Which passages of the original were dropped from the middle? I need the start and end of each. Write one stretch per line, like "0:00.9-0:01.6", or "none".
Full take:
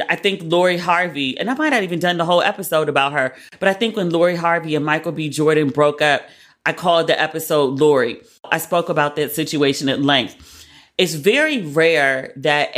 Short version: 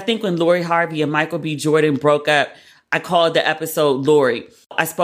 none